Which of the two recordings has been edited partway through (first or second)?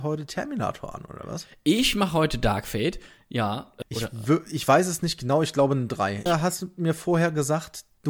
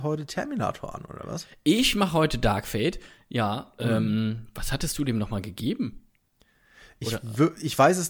first